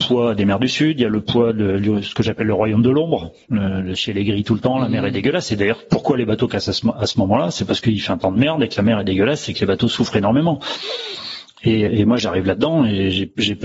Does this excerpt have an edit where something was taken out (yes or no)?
yes